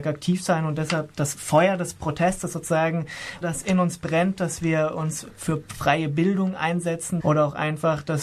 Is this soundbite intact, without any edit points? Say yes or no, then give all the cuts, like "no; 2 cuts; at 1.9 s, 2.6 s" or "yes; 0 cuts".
no; 2 cuts; at 3.4 s, 7.2 s